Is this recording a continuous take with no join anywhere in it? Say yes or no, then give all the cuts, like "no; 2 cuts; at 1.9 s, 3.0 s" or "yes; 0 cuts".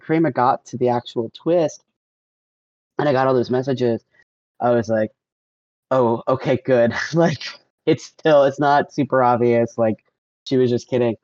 yes; 0 cuts